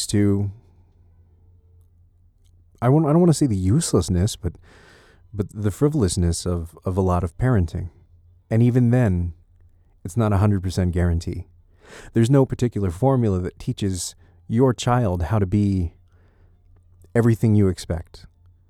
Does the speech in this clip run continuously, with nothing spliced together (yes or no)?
no